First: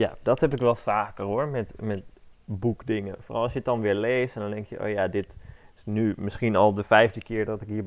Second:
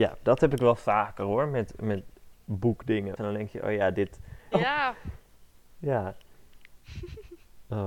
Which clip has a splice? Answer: second; 2 cuts; at 3.2 s, 4.5 s

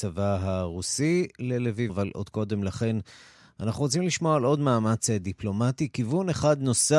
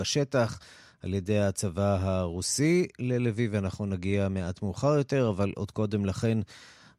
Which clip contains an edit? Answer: first; 1 cut; at 1.9 s

